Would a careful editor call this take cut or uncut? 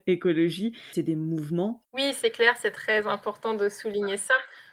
cut